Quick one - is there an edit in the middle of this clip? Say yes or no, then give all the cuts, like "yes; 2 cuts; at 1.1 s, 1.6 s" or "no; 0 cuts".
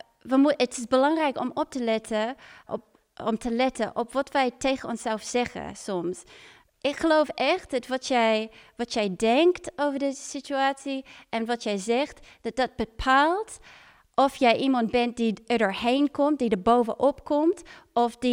yes; 2 cuts; at 2.7 s, 6.7 s